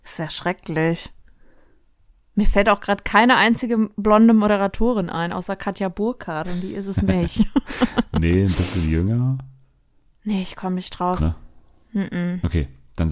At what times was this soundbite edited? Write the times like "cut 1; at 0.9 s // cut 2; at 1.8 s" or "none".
cut 1; at 11.2 s